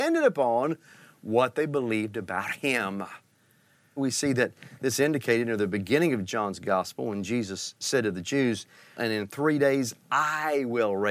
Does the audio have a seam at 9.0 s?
yes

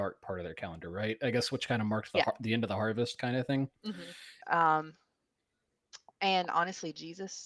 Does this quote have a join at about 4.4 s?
yes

